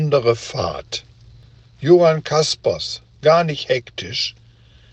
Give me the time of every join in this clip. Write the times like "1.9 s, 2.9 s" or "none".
3.1 s

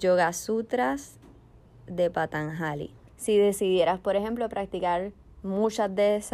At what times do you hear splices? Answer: 3.1 s

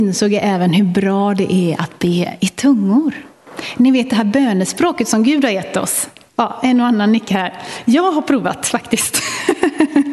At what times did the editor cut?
6.3 s

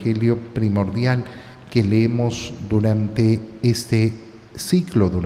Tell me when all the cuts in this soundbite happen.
none

